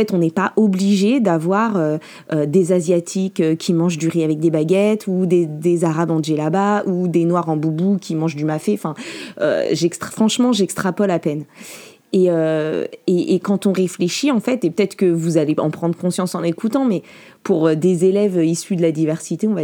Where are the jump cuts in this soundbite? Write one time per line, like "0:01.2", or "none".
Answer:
none